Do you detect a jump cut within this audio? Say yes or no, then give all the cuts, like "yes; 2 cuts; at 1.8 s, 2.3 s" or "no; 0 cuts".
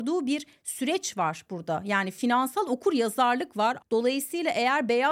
yes; 1 cut; at 3.8 s